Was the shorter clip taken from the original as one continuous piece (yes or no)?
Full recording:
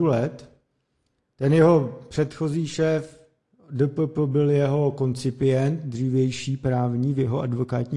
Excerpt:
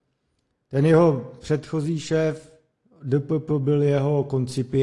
yes